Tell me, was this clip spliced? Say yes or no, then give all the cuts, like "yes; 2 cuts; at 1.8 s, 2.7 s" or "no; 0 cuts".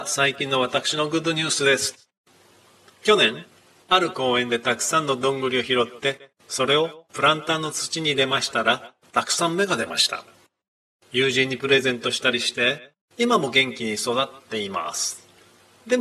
no; 0 cuts